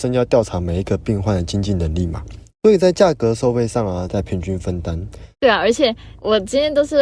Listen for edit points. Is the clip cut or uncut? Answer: cut